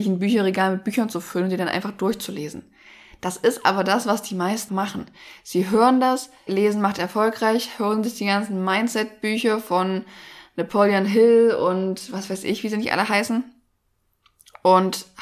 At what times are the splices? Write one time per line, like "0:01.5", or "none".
0:04.7
0:06.5